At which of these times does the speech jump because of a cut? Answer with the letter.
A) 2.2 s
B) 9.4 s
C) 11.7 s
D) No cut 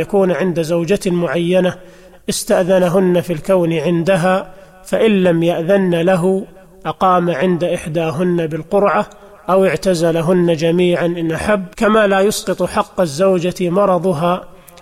C